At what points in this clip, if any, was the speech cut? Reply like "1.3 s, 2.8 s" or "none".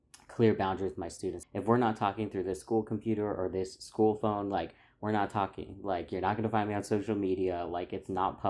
1.4 s